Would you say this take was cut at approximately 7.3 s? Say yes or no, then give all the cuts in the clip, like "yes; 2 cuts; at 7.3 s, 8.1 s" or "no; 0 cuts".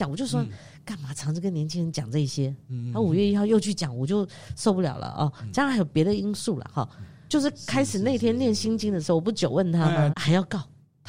yes; 2 cuts; at 7.3 s, 10.1 s